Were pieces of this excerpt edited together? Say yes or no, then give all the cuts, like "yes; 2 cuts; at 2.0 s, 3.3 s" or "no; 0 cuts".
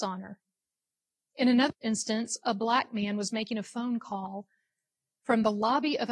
no; 0 cuts